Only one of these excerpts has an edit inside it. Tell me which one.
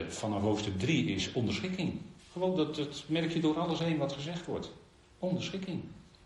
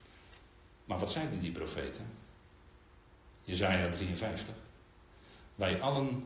first; 1 cut; at 2.2 s

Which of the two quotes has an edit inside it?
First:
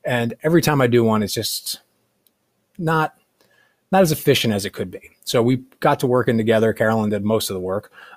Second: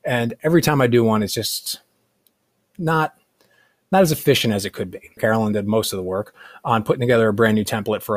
second; 1 cut; at 5.2 s

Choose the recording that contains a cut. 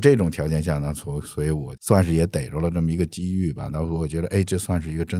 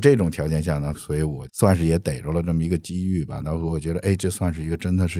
second; 1 cut; at 0.9 s

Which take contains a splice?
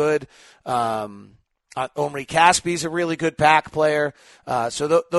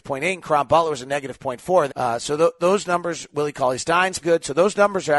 second; 2 cuts; at 1.9 s, 4.2 s

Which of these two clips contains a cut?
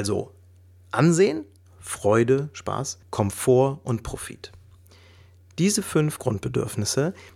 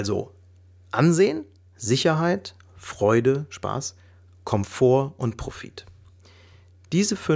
first; 2 cuts; at 1.7 s, 3.0 s

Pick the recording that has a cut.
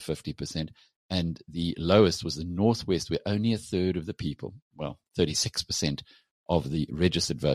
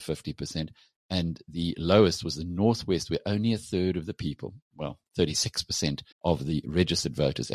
second; 1 cut; at 6.1 s

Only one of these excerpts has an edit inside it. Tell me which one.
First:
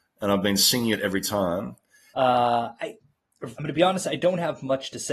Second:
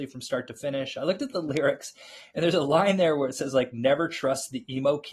first; 2 cuts; at 2.1 s, 3.5 s

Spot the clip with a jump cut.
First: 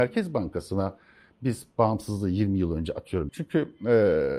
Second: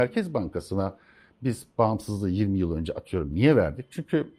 first; 1 cut; at 3.3 s

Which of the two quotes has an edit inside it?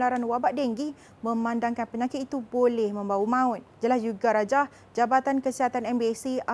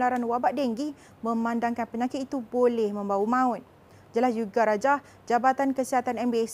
first; 1 cut; at 3.7 s

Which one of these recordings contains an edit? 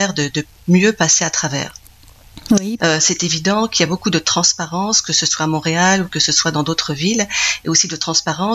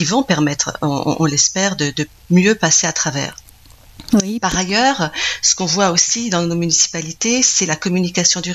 first; 2 cuts; at 2.8 s, 7.6 s

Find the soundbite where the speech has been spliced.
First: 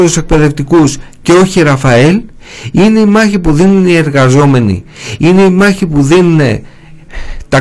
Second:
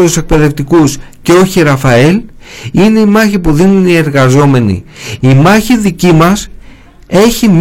second; 1 cut; at 5.2 s

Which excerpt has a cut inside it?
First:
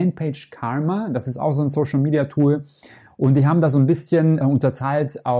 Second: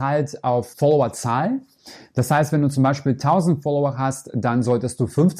first; 1 cut; at 4.4 s

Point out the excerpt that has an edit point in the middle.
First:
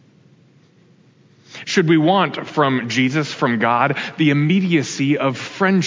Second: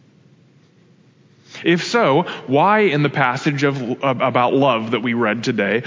first; 1 cut; at 1.6 s

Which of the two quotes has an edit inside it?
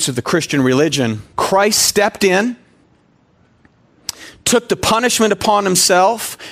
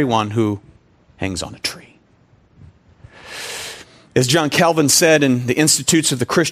first; 1 cut; at 1.3 s

